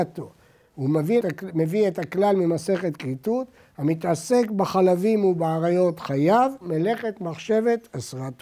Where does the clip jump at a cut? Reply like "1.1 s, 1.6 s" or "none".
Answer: 1.2 s, 6.6 s